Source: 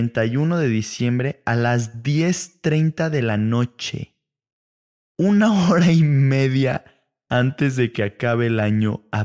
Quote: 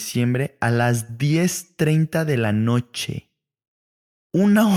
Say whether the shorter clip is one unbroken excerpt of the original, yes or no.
yes